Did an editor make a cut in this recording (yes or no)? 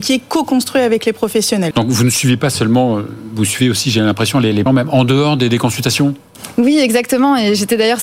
yes